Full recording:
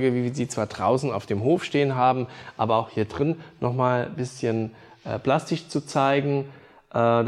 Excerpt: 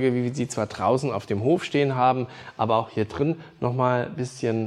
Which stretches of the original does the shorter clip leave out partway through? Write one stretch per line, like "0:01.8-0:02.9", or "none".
none